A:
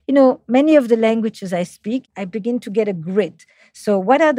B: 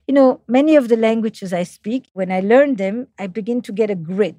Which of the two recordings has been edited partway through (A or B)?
A